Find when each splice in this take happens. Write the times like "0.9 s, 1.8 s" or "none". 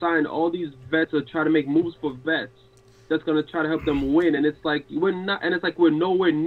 none